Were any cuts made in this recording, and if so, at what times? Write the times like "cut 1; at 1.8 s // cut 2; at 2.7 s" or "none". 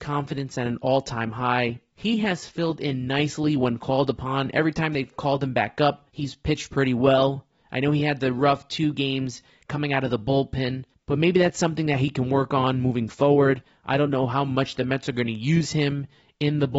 none

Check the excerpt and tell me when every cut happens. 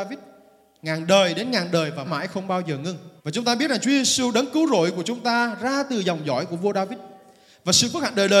cut 1; at 2.0 s // cut 2; at 3.2 s

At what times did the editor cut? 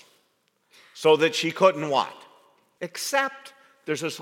cut 1; at 2.8 s

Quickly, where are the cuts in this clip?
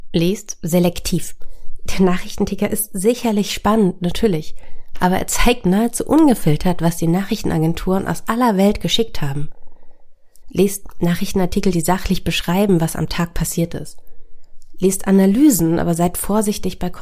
cut 1; at 10.4 s

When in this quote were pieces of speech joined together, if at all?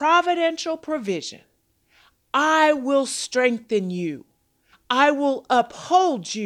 cut 1; at 4.7 s

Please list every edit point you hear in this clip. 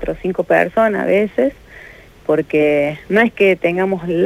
none

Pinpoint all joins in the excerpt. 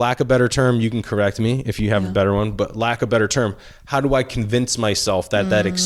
none

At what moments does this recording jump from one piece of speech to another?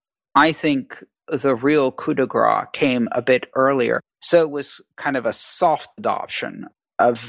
cut 1; at 4.1 s

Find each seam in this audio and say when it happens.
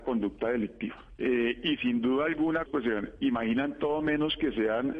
cut 1; at 1.2 s // cut 2; at 2.7 s

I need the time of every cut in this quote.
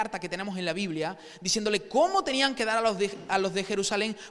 none

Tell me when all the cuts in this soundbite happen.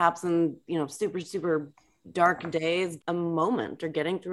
cut 1; at 3.0 s

